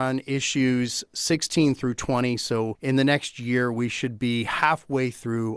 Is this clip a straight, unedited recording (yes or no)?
yes